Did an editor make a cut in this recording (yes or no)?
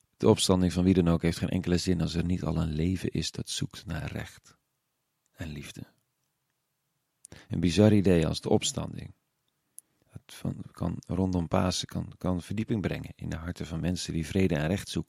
no